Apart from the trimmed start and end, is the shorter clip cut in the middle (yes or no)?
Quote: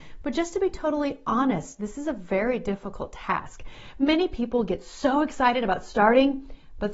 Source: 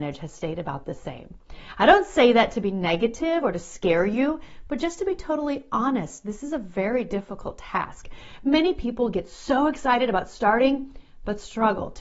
no